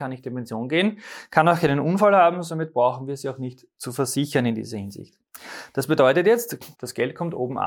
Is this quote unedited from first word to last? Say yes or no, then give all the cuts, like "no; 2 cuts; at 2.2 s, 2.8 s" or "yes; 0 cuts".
no; 1 cut; at 6.7 s